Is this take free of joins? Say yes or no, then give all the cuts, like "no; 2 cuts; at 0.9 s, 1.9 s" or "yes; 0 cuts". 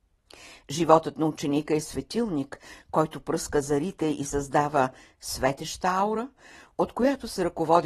yes; 0 cuts